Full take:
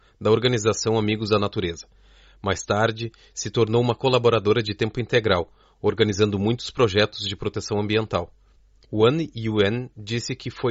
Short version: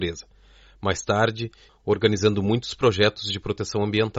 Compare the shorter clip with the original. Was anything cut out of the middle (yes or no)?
yes